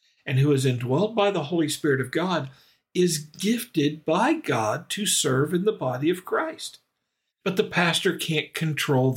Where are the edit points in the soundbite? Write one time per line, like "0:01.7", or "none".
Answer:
0:07.3